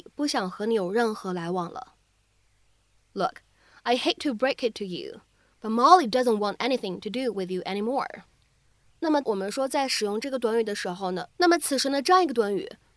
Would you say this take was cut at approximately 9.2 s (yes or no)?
yes